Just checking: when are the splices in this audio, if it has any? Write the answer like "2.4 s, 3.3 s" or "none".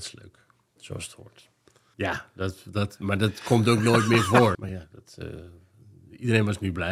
1.9 s, 4.5 s